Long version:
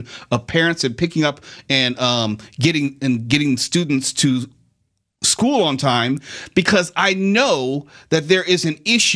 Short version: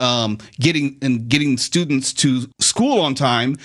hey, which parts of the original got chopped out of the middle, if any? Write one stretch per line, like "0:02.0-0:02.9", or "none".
0:04.5-0:05.1